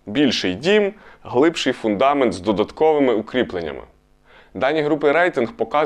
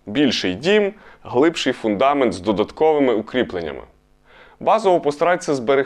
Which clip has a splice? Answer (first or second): first